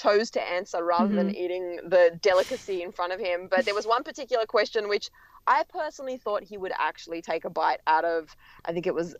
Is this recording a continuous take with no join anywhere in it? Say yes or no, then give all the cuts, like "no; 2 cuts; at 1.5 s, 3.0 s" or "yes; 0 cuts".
yes; 0 cuts